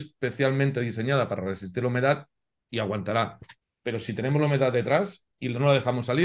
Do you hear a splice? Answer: no; 0 cuts

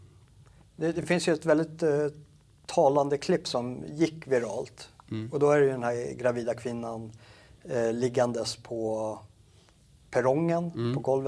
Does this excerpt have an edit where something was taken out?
no; 0 cuts

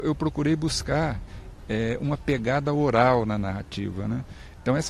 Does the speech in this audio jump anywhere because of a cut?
no; 0 cuts

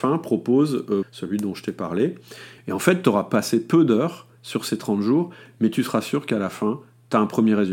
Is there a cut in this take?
yes; 2 cuts; at 1.0 s, 2.6 s

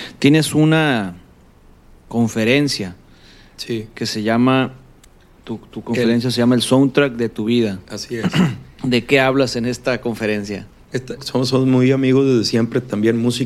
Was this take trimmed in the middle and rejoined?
yes; 2 cuts; at 8.7 s, 11.2 s

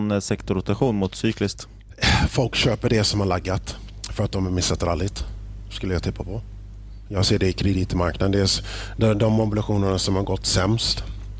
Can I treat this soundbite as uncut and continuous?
yes; 0 cuts

